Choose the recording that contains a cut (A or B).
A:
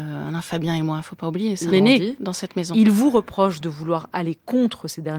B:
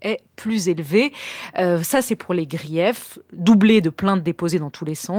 A